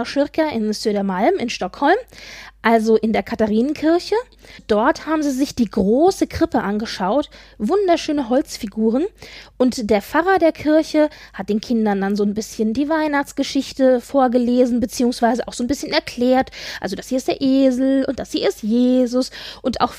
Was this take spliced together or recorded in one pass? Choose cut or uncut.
uncut